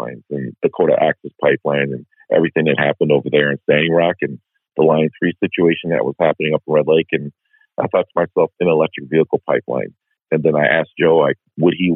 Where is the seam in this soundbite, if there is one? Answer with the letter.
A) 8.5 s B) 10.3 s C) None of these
A